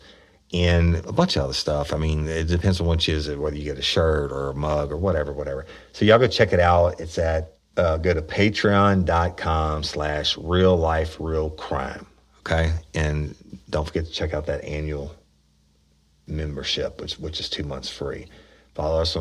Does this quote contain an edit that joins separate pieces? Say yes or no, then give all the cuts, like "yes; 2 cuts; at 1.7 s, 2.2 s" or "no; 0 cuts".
no; 0 cuts